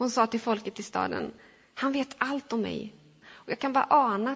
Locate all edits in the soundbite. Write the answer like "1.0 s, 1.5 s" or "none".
3.2 s